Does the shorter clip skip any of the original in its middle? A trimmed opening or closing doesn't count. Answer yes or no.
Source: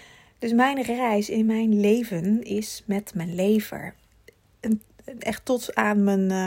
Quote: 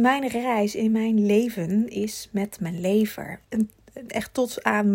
yes